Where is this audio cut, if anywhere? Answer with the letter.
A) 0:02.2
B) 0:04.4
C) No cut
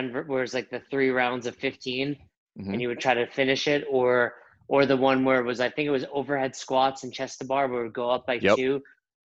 C